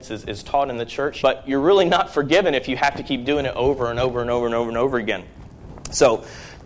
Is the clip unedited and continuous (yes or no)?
no